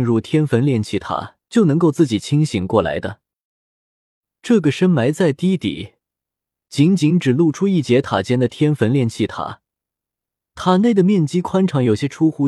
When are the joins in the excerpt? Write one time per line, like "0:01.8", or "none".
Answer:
0:01.4